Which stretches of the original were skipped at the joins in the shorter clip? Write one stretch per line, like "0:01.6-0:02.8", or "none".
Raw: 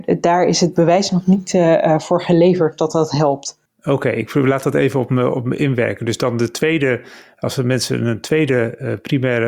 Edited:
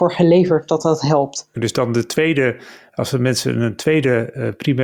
0:03.6-0:06.0